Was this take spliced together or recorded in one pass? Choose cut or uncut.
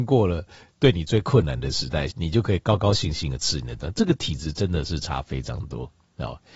cut